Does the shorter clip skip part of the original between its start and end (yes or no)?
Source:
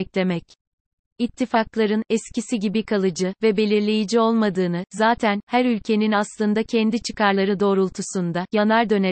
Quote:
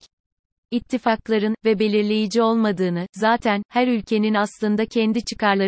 yes